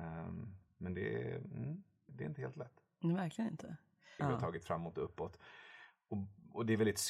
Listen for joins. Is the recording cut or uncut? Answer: cut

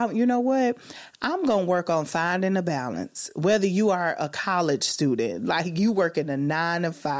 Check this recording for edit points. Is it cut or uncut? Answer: uncut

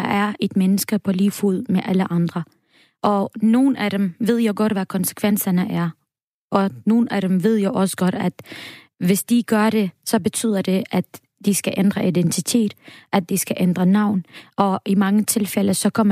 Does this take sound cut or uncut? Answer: uncut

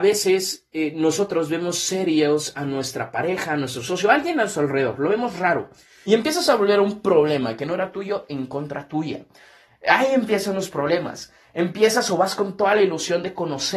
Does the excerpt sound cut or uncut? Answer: cut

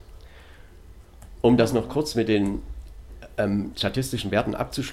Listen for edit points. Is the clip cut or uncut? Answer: uncut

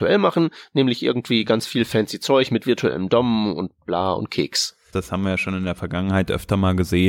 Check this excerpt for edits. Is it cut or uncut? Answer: cut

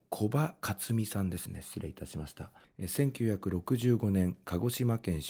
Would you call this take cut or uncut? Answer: cut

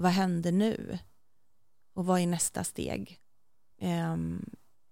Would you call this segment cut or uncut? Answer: cut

